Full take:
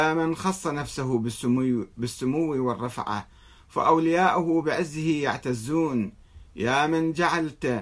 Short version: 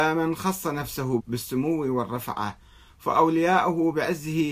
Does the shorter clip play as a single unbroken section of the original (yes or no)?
no